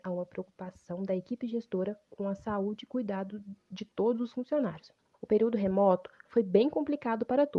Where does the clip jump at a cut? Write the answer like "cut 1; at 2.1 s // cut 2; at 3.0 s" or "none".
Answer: cut 1; at 5.1 s